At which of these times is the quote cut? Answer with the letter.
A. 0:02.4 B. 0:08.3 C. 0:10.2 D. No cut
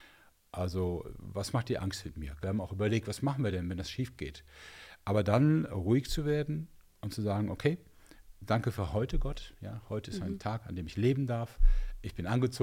A